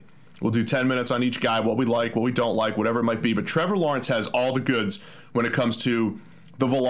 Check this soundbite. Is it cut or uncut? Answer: uncut